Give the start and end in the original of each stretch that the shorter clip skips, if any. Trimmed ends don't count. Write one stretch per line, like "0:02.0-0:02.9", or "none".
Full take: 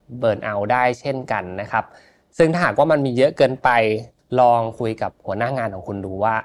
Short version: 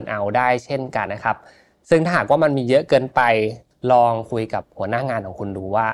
0:01.4-0:01.5